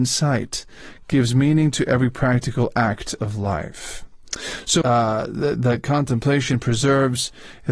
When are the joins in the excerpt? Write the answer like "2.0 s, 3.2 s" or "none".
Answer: 4.8 s